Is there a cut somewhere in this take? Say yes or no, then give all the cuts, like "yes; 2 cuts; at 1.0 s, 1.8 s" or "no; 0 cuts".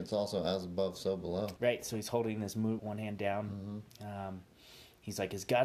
yes; 2 cuts; at 1.6 s, 2.8 s